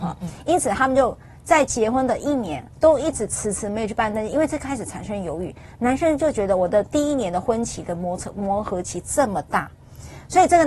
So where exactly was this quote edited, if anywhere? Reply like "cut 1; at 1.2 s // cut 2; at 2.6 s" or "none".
none